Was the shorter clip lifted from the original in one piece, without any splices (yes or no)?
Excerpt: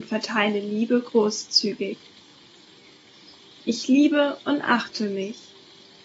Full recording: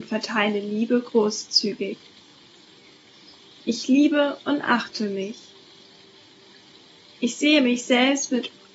yes